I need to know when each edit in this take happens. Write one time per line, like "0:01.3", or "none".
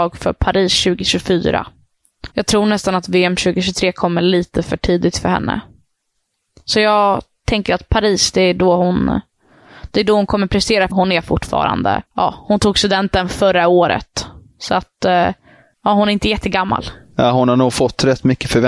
0:02.3
0:10.9
0:12.1